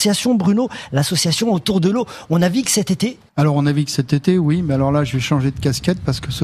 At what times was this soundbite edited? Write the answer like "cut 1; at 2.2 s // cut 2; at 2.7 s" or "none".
none